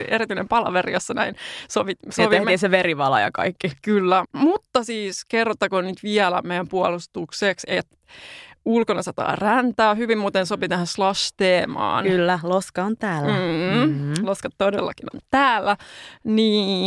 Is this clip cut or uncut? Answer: cut